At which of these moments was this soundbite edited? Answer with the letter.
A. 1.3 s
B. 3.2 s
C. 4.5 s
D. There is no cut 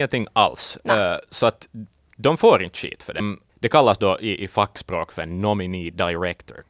B